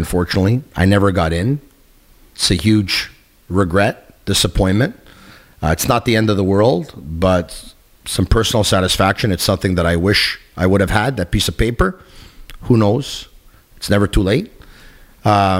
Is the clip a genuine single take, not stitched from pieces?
yes; 0 cuts

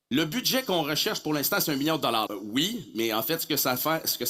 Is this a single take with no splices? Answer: no; 1 cut; at 2.3 s

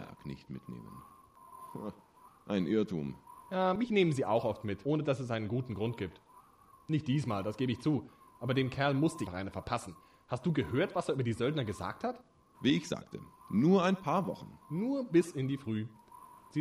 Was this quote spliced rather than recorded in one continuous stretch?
yes; 3 cuts; at 9.3 s, 12.5 s, 14.6 s

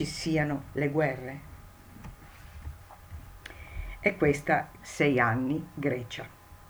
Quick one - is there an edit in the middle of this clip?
yes; 1 cut; at 4.8 s

